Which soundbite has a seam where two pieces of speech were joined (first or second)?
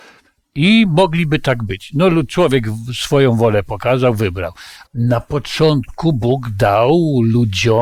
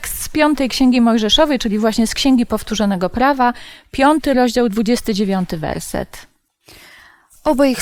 first